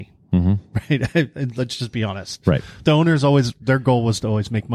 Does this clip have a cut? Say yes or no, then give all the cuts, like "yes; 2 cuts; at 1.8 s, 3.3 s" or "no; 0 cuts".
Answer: no; 0 cuts